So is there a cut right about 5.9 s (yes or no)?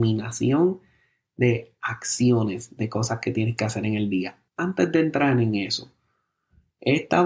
no